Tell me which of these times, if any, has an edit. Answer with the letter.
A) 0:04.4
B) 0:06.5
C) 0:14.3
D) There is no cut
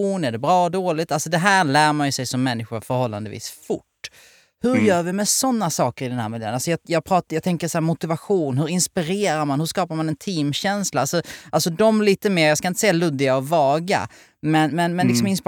D